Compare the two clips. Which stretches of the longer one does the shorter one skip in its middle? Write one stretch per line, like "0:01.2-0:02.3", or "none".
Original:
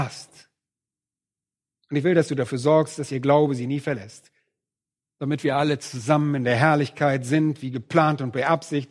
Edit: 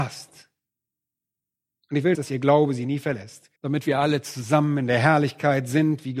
0:02.1-0:03.0
0:04.4-0:05.1

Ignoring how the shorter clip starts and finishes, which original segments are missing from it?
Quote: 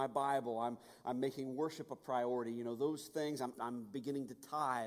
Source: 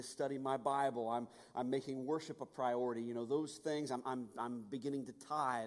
0:04.0-0:04.3

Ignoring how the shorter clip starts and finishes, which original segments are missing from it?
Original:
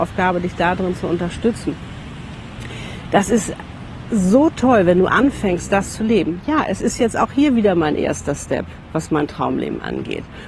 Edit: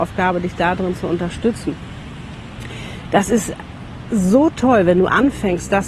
none

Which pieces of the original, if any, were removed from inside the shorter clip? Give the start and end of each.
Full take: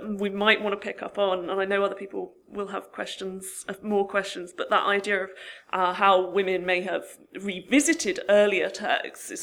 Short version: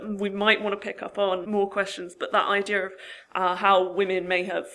0:01.4-0:03.8

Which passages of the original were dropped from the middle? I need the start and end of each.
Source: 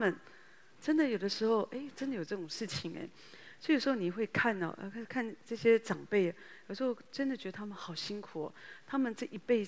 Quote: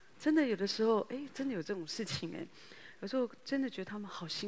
0:03.5-0:06.6

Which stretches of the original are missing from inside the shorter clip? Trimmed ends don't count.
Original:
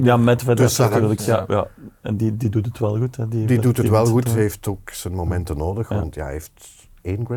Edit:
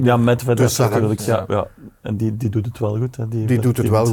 none

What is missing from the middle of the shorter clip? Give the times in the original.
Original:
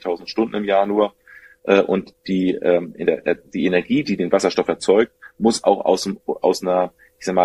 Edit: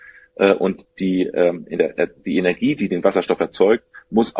none

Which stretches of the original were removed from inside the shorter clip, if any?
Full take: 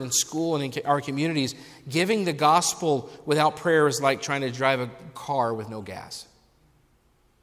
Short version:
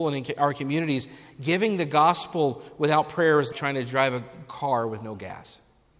0:04.0-0:04.2

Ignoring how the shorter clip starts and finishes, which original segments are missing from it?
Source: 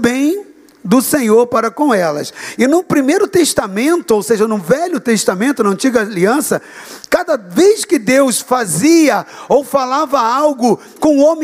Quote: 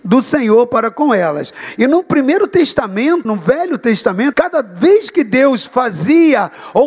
0:04.0-0:04.5
0:05.5-0:07.1

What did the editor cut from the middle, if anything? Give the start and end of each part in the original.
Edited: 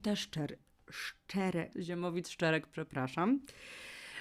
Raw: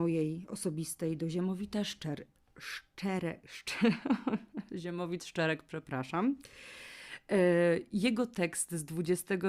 0:03.4-0:04.7

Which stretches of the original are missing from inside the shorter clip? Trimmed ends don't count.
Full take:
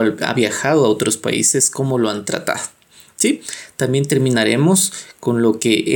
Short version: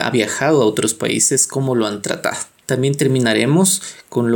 0:02.9-0:03.7

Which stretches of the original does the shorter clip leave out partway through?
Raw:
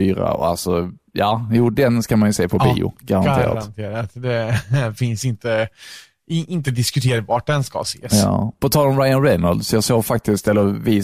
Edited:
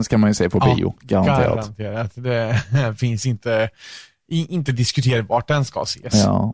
none

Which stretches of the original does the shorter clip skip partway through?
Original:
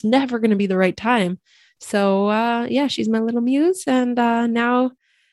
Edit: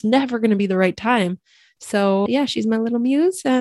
0:02.3-0:02.7

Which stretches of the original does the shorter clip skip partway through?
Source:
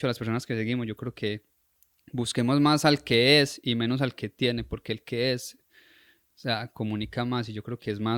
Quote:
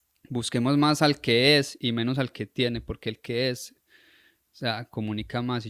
none

